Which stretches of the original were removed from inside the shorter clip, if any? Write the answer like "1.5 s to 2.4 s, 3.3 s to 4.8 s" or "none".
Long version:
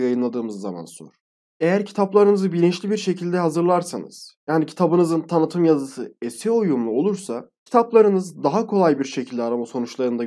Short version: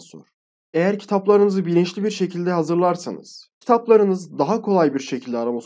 4.4 s to 7.6 s